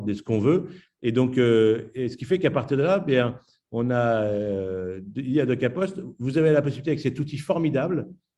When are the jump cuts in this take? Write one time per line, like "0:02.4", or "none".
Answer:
none